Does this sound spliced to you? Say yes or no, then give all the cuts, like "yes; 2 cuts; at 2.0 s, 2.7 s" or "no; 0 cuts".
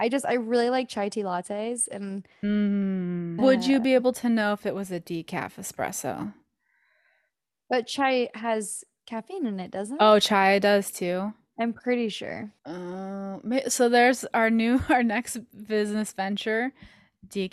yes; 2 cuts; at 3.4 s, 12.6 s